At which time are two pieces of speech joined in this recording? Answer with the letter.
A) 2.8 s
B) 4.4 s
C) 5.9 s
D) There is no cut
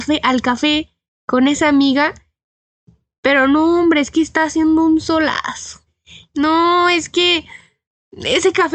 C